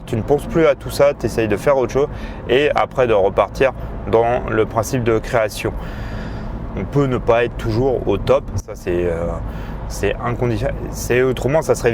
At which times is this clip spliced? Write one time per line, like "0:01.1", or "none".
0:06.7